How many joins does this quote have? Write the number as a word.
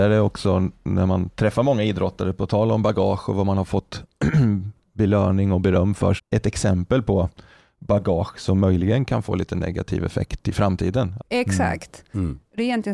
two